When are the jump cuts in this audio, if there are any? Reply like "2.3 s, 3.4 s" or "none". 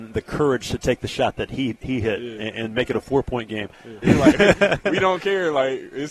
4.0 s